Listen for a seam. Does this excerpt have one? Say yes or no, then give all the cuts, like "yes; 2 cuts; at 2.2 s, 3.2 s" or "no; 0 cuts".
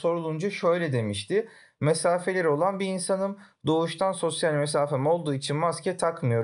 no; 0 cuts